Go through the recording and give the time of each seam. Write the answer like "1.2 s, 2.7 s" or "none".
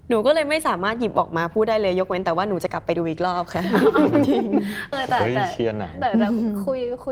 4.9 s